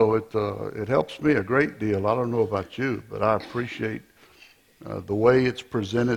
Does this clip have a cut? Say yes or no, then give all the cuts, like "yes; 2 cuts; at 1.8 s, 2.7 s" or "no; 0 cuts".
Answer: no; 0 cuts